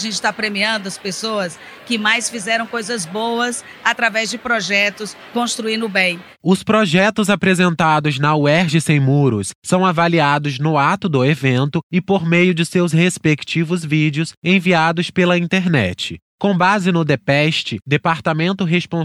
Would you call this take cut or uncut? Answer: uncut